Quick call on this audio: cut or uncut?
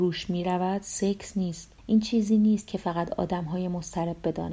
cut